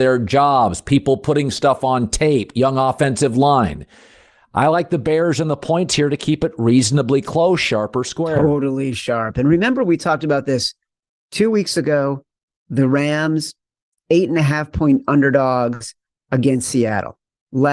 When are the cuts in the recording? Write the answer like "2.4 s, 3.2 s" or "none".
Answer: none